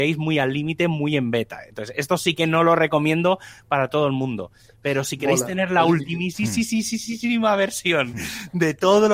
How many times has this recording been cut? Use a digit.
0